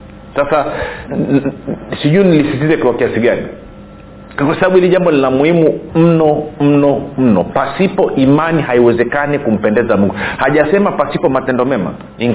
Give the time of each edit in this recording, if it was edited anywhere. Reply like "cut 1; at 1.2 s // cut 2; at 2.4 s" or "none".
cut 1; at 1.1 s // cut 2; at 5.9 s